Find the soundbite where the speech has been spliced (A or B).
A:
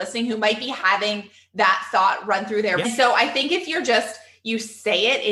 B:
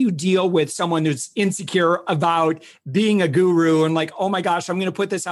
A